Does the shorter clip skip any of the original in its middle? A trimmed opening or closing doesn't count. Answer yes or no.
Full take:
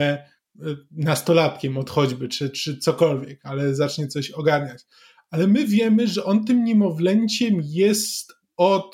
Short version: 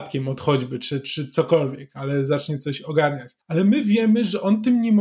yes